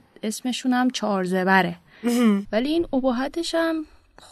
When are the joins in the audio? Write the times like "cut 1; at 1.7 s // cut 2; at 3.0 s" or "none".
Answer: cut 1; at 2.4 s

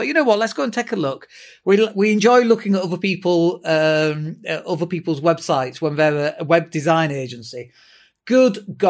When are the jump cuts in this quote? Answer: none

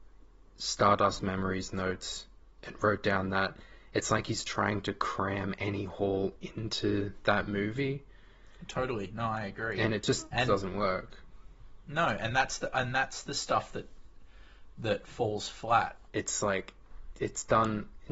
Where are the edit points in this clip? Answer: cut 1; at 16.1 s // cut 2; at 17.1 s

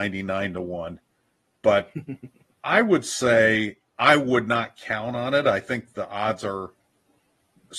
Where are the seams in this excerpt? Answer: none

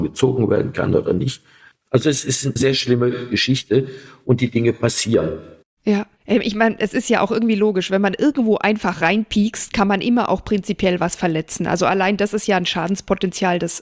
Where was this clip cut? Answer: cut 1; at 6.1 s

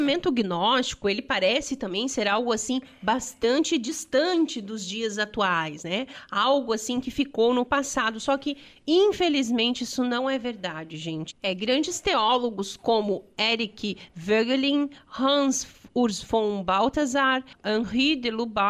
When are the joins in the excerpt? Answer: none

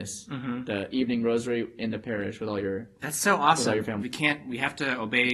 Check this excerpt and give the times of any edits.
cut 1; at 4.0 s

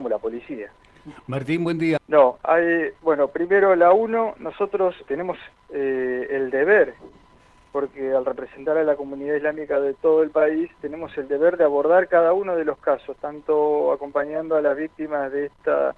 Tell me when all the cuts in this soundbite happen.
cut 1; at 2.0 s // cut 2; at 5.0 s

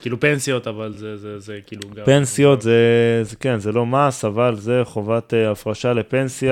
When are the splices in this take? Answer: none

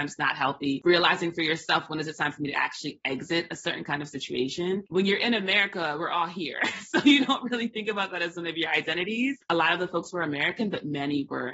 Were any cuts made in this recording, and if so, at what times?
cut 1; at 4.9 s // cut 2; at 9.5 s

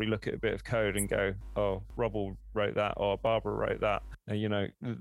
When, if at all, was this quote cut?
none

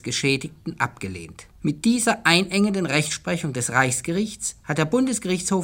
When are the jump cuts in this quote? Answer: cut 1; at 1.5 s

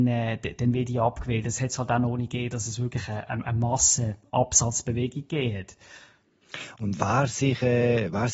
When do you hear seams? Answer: cut 1; at 3.4 s

